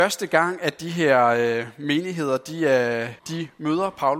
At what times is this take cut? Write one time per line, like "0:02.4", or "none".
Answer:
0:03.2